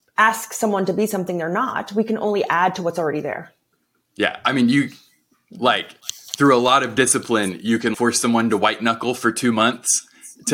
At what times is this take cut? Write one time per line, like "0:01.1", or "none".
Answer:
0:07.9